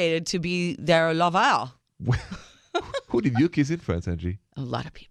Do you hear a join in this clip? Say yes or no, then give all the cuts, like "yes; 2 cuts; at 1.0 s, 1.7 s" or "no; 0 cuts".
no; 0 cuts